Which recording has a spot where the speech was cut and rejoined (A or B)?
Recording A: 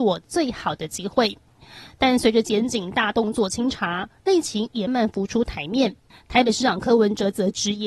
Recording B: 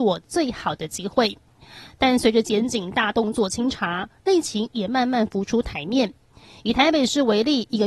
A